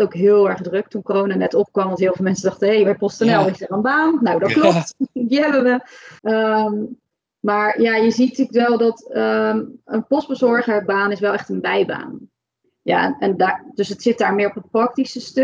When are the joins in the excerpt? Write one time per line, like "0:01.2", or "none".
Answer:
0:06.2
0:12.6